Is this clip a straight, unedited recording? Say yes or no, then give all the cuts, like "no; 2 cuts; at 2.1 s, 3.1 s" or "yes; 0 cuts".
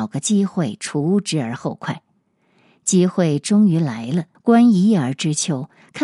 no; 1 cut; at 4.3 s